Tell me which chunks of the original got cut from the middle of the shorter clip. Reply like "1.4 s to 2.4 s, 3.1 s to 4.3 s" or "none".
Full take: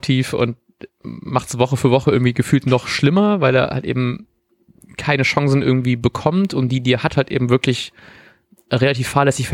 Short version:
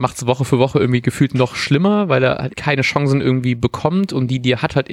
3.8 s to 4.9 s